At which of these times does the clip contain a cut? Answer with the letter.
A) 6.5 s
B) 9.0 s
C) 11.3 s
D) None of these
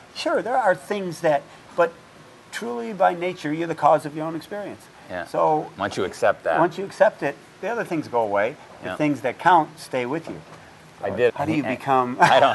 C